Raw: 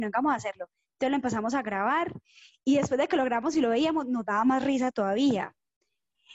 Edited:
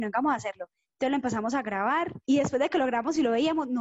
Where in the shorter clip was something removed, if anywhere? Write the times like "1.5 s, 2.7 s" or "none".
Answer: 2.2 s